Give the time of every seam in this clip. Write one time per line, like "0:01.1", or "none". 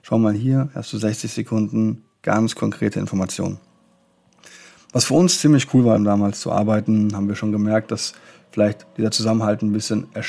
0:06.0